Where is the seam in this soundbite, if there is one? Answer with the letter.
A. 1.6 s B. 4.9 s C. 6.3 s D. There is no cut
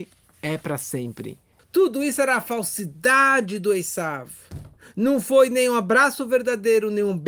A